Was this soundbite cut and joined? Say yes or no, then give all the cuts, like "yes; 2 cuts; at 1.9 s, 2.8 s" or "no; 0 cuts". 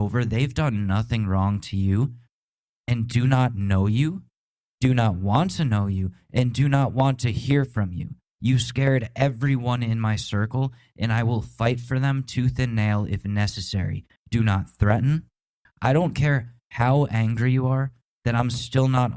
yes; 2 cuts; at 14.2 s, 15.6 s